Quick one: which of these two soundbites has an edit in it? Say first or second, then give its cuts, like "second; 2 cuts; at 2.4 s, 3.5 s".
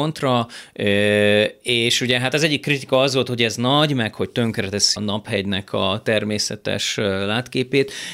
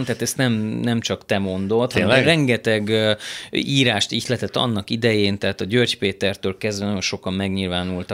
first; 1 cut; at 5.0 s